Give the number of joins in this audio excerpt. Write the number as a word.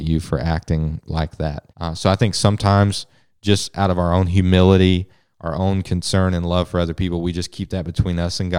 one